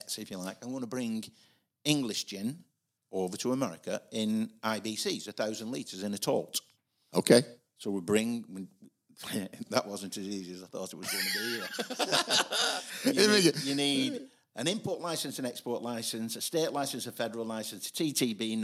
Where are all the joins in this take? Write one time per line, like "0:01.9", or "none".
none